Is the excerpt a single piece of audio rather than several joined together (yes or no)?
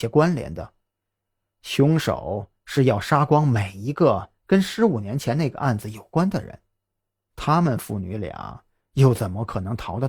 yes